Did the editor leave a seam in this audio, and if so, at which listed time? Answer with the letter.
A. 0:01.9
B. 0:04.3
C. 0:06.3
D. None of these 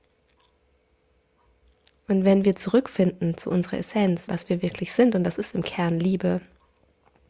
B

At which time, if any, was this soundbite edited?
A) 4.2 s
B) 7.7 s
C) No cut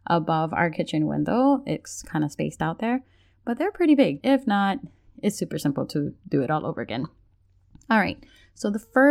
A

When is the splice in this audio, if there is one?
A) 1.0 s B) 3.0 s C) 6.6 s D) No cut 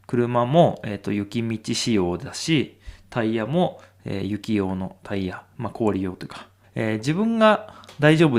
C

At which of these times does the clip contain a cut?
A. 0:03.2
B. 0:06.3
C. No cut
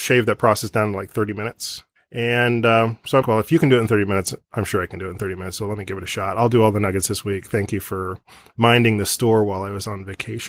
A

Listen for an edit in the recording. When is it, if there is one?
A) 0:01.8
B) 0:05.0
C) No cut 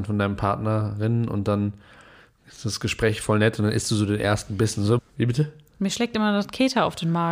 B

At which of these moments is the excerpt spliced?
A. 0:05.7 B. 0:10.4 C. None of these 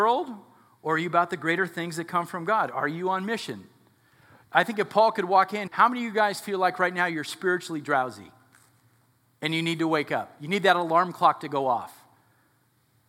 A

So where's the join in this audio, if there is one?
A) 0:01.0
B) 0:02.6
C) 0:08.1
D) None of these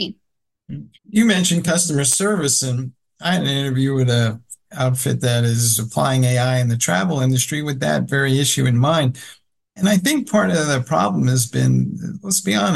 A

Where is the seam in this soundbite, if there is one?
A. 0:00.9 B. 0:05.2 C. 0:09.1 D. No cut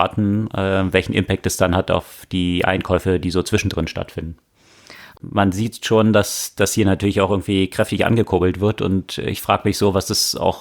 B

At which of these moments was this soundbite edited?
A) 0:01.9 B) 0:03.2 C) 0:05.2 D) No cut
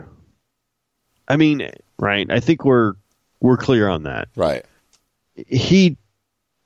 A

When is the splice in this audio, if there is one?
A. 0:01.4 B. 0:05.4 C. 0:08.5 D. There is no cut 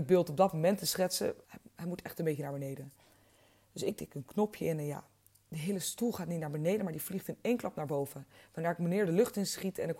A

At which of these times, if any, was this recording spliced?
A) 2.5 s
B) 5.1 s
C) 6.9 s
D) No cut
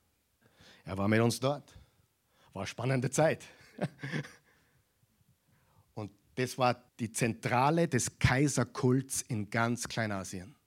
C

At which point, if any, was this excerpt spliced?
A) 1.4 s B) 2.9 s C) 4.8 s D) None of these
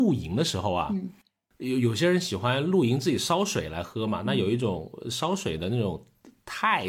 D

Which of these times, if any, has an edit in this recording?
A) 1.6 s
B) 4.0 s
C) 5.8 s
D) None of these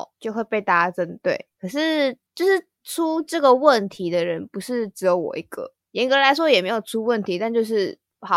D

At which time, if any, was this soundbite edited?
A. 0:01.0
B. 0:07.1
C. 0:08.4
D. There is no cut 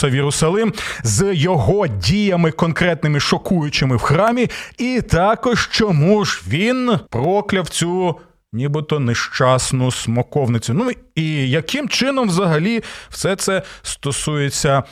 B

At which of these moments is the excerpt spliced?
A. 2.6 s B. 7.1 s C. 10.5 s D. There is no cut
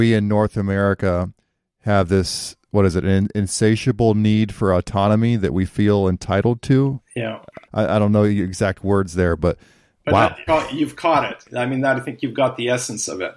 C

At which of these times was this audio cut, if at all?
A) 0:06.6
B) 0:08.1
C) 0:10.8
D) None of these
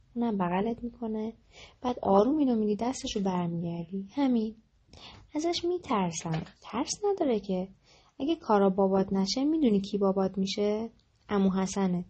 A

